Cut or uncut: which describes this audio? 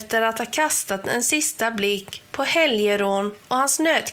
uncut